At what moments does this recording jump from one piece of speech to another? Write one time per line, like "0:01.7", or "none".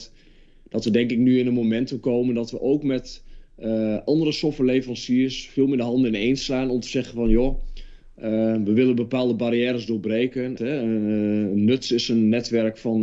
0:10.6